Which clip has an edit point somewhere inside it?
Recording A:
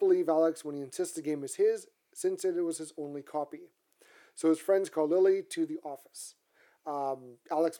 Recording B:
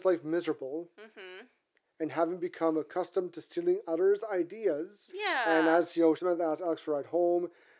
B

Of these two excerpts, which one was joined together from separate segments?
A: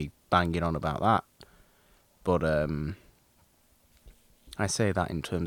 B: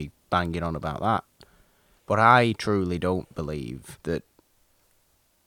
B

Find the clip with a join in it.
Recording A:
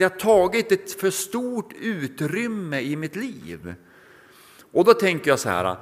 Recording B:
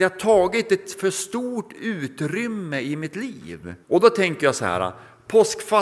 B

